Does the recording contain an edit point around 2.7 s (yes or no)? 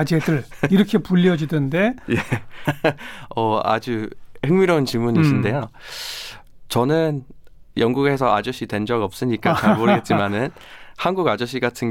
yes